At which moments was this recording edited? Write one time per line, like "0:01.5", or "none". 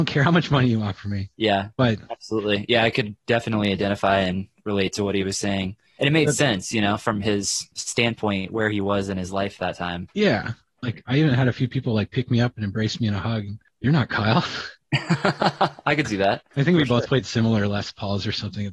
0:01.3
0:10.8